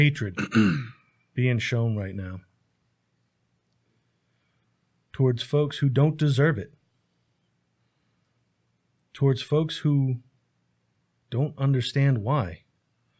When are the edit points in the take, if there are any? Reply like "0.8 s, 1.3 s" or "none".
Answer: none